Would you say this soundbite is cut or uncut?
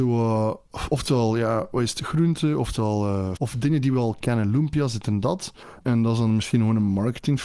cut